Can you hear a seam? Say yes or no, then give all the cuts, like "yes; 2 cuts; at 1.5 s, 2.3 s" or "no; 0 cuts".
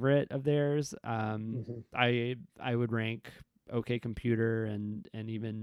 yes; 1 cut; at 2.5 s